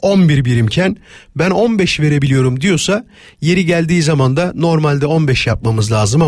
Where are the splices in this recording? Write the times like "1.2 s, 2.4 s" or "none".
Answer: none